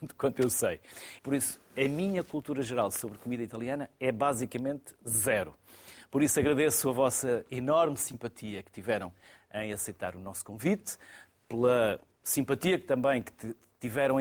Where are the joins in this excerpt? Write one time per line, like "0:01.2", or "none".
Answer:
0:01.2
0:06.1